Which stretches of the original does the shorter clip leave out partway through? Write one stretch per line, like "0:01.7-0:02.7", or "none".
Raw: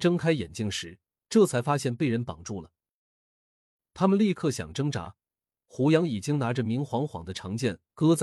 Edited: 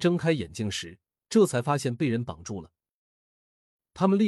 none